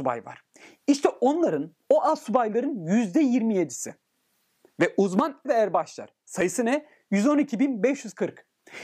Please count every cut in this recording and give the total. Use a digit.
1